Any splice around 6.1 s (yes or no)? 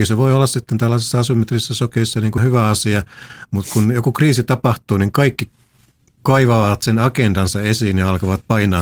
no